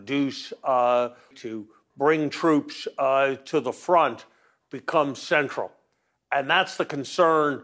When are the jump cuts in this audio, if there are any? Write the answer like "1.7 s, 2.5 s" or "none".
1.3 s